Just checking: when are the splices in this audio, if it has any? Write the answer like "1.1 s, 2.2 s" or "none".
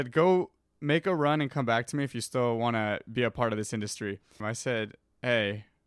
4.4 s